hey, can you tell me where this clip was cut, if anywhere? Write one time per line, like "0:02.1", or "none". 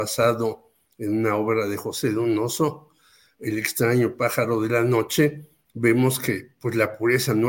none